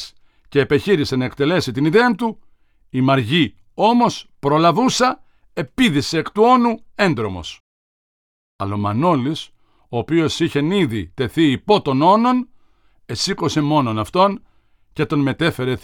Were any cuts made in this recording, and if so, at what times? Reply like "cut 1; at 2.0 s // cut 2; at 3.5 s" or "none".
none